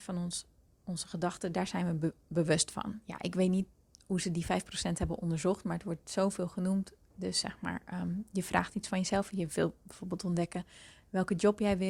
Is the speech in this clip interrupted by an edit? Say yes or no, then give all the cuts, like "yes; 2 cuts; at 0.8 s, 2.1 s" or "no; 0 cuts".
yes; 1 cut; at 7.1 s